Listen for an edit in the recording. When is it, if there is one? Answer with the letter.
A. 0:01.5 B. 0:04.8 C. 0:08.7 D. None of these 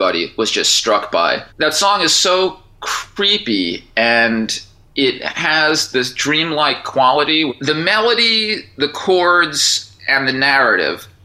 A